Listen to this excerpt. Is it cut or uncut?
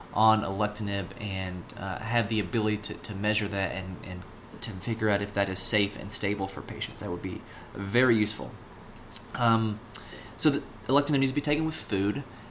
cut